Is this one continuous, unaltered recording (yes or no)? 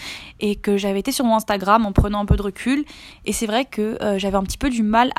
yes